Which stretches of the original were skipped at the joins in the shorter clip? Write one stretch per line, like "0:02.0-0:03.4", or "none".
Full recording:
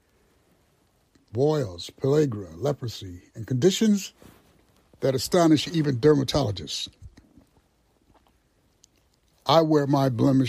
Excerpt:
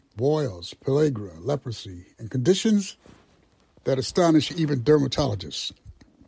none